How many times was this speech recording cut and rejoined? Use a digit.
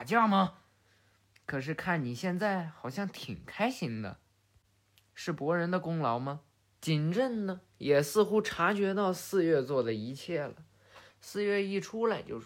2